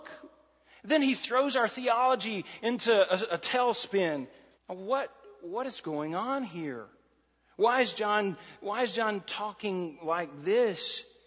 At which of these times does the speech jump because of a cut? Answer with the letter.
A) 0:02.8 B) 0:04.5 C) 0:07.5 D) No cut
B